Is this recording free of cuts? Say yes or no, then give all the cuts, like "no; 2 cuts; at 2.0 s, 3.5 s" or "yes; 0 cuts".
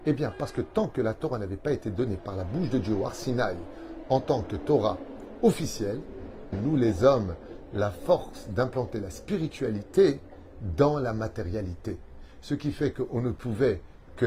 no; 1 cut; at 6.5 s